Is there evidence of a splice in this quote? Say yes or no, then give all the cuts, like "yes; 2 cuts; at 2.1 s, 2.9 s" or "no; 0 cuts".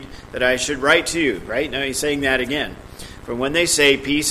yes; 1 cut; at 3.2 s